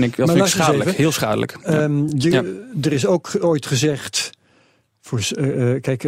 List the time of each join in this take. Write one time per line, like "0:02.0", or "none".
none